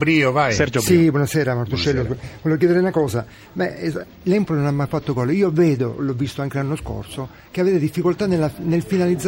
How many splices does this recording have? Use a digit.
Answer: 1